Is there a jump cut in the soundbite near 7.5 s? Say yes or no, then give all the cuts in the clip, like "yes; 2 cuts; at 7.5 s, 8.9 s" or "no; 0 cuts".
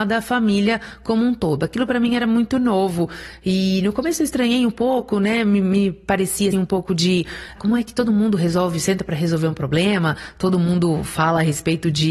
yes; 2 cuts; at 6.5 s, 7.5 s